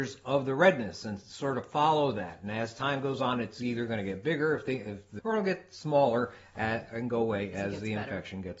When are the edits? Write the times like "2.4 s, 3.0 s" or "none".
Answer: 5.2 s